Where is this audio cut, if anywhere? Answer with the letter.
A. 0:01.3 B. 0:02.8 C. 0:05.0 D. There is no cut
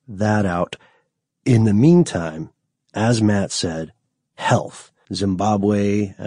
C